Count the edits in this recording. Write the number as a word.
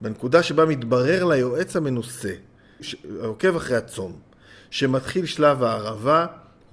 one